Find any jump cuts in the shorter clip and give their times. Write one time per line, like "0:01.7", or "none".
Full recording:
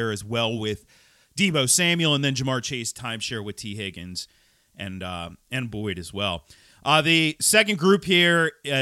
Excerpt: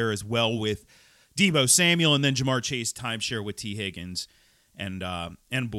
none

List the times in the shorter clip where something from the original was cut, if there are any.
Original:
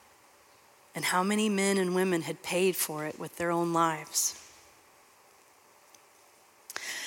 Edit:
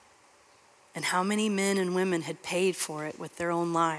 none

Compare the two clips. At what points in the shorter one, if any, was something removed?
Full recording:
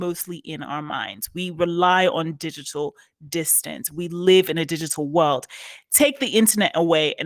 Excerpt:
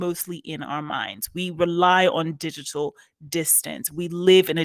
none

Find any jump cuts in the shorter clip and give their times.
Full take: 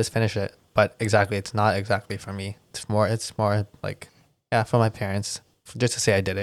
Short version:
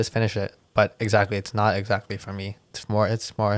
none

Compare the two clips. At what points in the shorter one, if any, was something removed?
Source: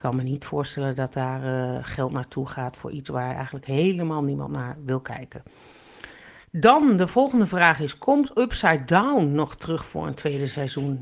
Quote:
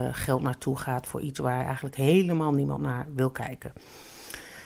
none

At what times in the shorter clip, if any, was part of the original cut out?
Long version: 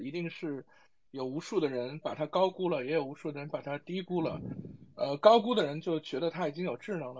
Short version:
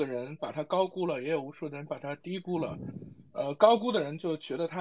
none

